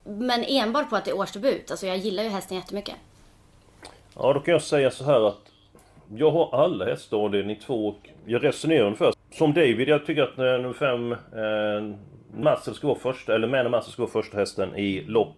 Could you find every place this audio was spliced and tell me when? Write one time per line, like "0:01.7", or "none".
0:09.1
0:12.4